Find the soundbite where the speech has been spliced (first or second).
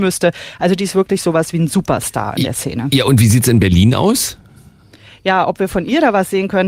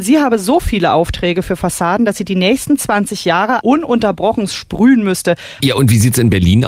second